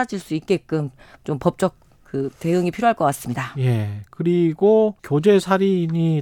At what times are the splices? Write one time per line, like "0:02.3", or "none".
0:05.0